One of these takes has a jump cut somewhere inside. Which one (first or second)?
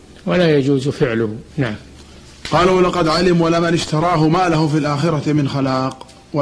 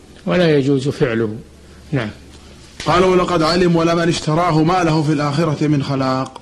first